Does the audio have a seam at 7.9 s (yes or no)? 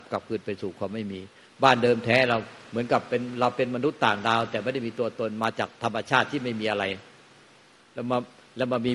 no